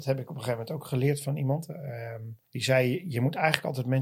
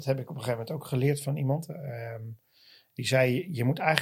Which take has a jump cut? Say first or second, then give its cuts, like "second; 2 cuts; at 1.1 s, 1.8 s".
first; 1 cut; at 2.4 s